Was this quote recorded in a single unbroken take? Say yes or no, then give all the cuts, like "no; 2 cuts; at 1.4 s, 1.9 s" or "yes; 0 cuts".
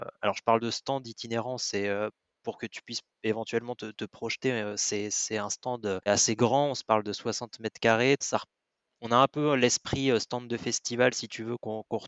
no; 2 cuts; at 6.1 s, 8.2 s